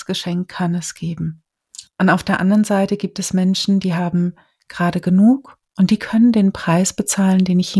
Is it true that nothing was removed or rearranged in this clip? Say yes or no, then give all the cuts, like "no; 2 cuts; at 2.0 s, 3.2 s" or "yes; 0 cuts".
no; 1 cut; at 1.9 s